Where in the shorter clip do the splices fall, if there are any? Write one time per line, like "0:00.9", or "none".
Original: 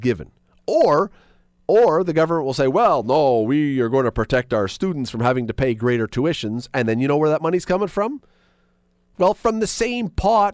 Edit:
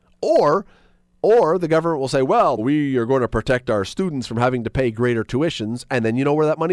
0:02.6